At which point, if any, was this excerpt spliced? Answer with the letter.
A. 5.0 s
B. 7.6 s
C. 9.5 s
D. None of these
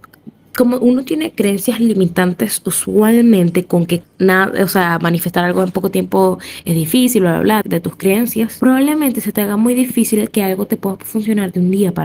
B